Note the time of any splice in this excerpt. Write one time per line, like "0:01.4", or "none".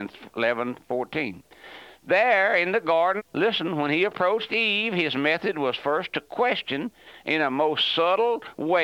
0:03.2